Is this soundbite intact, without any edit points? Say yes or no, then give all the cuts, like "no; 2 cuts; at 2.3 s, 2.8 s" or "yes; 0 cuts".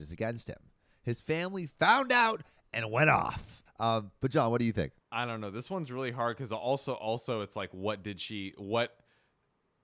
no; 1 cut; at 3.7 s